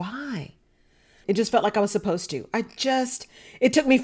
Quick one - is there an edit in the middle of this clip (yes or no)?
yes